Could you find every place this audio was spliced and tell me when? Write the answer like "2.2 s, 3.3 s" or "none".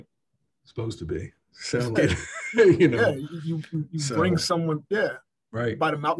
2.0 s